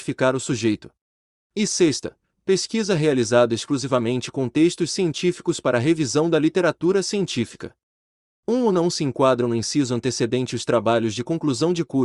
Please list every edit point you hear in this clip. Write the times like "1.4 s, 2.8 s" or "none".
1.4 s, 8.4 s